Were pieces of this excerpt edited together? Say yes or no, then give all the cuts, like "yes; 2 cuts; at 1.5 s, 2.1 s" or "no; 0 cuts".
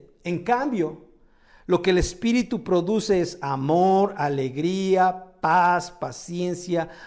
no; 0 cuts